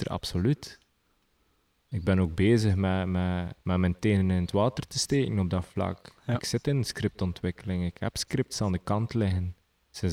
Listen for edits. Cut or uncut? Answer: cut